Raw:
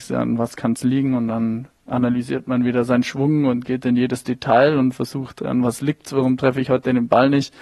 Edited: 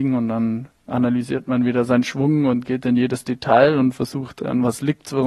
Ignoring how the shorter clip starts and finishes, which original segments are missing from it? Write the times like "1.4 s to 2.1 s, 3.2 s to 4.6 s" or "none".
none